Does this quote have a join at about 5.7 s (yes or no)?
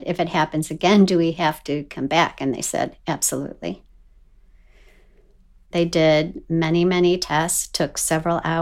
yes